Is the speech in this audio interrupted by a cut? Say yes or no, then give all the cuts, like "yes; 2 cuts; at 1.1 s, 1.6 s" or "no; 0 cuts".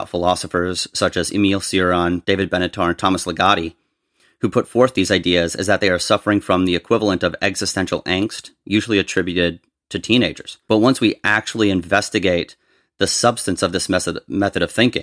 yes; 1 cut; at 2.2 s